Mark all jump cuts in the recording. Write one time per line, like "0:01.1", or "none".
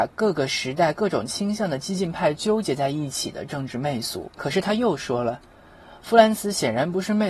0:04.3